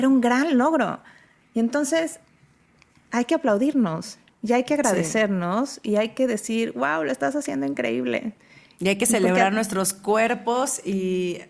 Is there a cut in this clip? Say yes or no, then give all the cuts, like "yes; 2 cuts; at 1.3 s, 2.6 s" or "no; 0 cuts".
no; 0 cuts